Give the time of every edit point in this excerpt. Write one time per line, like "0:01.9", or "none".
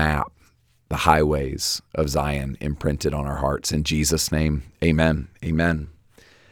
none